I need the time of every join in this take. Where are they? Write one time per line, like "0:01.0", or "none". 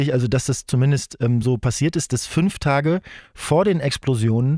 none